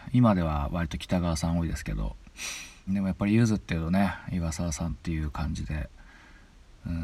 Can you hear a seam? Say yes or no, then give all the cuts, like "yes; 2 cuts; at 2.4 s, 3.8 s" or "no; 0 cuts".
yes; 1 cut; at 2.9 s